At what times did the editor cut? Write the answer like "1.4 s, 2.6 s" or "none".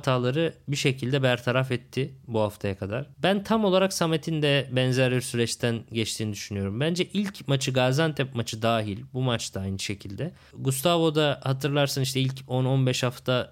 3.1 s, 10.5 s